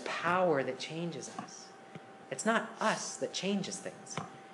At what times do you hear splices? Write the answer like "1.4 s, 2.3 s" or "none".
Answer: none